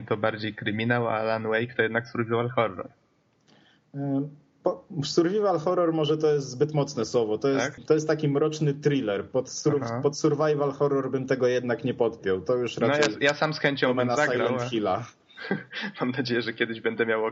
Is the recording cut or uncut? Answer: cut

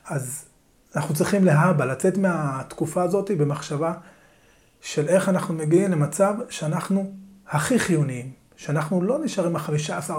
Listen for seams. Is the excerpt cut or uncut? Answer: uncut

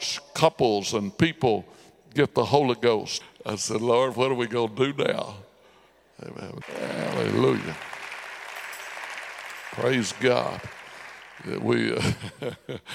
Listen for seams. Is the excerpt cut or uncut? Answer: cut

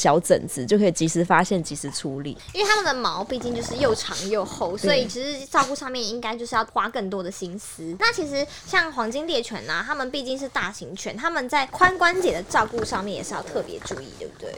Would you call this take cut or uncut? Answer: uncut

